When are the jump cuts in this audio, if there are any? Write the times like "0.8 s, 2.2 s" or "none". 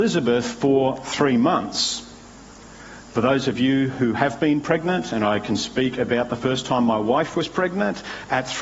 none